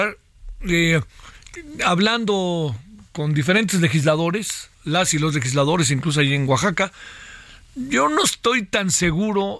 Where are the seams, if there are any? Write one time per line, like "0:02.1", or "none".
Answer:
0:04.7